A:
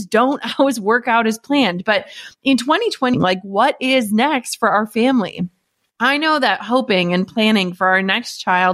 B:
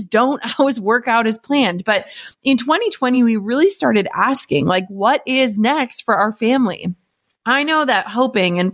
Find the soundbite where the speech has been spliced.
A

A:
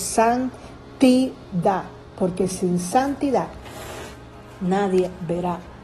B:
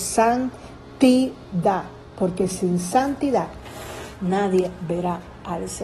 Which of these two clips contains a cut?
B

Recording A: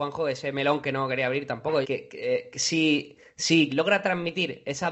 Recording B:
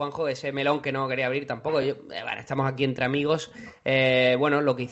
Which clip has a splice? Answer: A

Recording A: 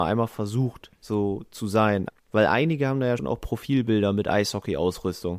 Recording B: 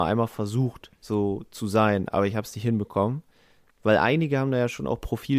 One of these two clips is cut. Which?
A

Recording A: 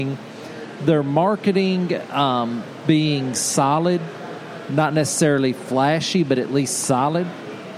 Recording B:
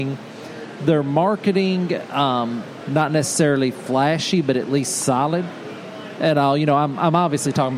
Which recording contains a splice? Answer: B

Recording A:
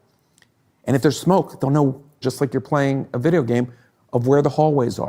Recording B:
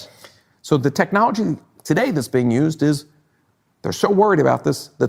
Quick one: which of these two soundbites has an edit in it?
A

